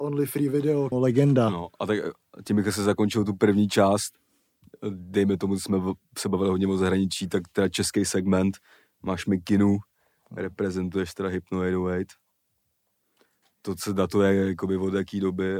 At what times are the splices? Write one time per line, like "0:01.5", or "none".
0:00.9